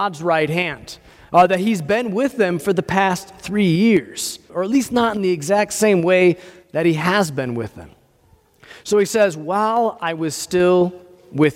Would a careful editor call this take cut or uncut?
cut